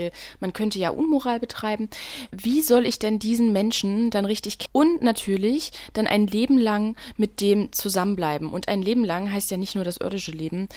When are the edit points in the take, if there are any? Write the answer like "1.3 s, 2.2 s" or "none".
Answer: 4.7 s